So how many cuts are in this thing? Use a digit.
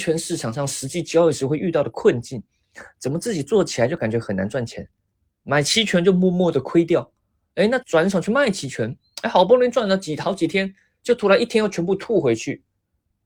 1